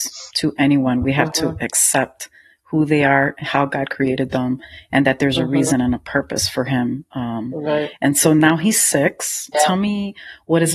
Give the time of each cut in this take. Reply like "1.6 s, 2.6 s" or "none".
none